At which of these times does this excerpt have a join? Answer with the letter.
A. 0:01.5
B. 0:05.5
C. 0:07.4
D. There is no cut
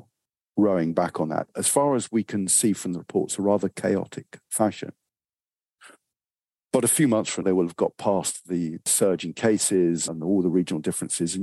C